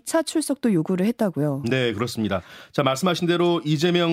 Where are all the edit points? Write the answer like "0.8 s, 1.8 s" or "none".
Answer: none